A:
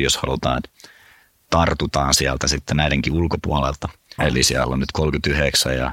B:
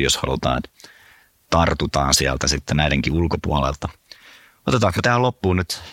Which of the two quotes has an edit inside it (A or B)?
A